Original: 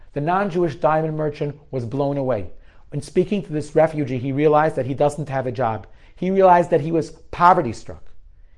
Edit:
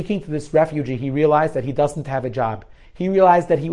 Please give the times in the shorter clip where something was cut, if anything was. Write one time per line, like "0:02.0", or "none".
none